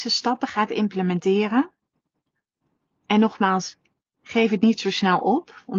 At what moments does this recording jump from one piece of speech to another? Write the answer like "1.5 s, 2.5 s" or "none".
none

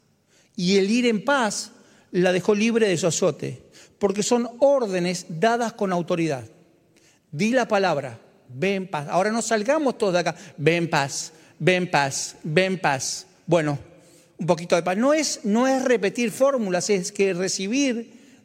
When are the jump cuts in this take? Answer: none

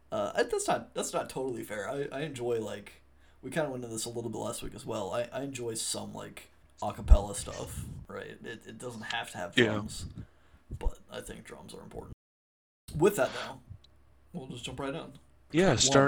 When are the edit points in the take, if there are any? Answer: none

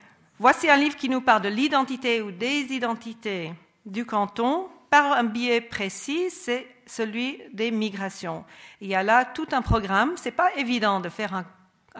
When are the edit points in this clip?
none

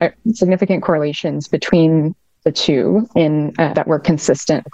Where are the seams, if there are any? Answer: 3.7 s

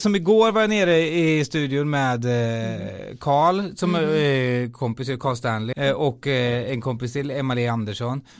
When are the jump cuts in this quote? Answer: 5.7 s

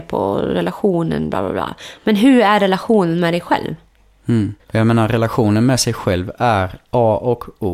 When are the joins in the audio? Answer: 4.6 s

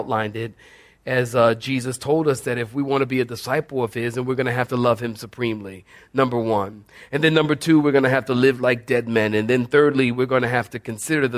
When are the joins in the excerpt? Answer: none

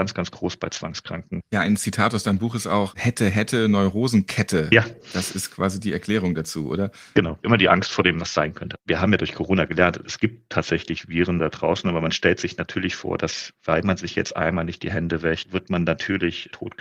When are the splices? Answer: 1.4 s

